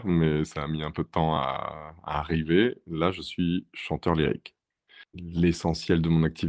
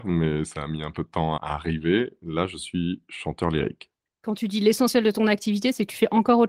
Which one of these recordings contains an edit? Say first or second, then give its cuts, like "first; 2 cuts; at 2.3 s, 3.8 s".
second; 2 cuts; at 1.4 s, 4.1 s